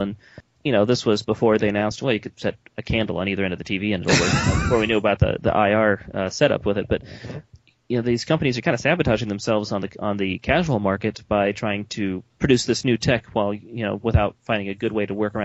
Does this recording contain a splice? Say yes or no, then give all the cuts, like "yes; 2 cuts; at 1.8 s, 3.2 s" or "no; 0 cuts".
no; 0 cuts